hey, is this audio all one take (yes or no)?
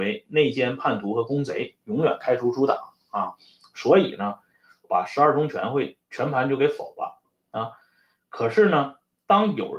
no